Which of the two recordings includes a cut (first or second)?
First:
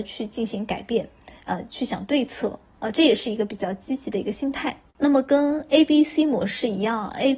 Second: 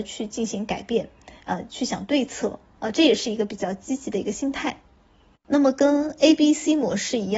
first